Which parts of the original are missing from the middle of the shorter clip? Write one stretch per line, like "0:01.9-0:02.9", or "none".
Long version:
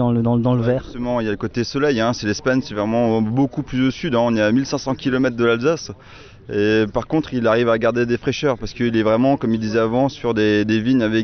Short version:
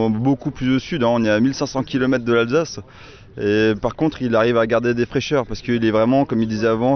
none